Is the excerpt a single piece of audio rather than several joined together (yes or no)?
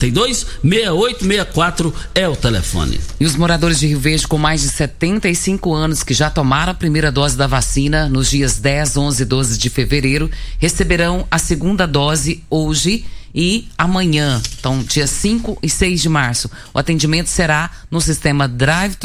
yes